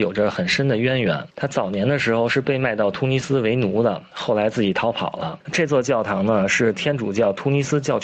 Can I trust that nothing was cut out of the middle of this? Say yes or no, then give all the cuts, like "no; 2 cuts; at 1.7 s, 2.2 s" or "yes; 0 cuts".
no; 1 cut; at 5.4 s